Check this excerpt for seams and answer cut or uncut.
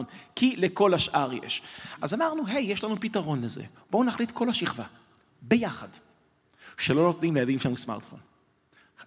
uncut